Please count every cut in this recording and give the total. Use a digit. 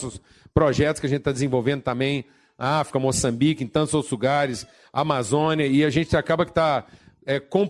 0